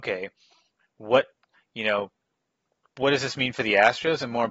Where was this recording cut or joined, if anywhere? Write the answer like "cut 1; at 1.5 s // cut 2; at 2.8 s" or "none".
none